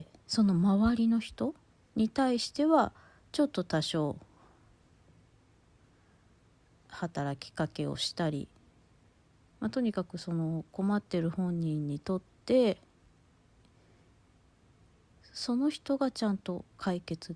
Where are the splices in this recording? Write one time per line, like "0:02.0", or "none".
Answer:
0:09.5